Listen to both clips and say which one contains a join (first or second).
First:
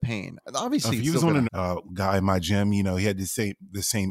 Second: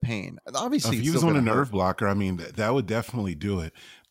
first